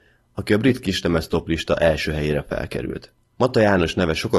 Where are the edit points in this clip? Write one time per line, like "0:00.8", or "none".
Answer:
0:03.2